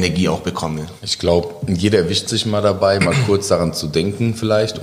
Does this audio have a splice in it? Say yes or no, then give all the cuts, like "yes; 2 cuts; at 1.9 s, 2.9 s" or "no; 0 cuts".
no; 0 cuts